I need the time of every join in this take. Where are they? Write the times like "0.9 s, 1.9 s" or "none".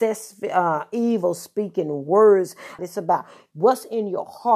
2.8 s